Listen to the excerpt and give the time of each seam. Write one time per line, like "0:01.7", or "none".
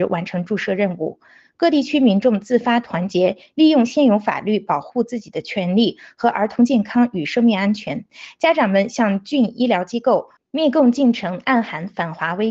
0:10.4